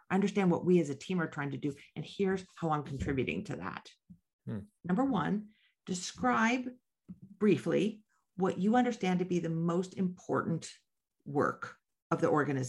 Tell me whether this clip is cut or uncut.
cut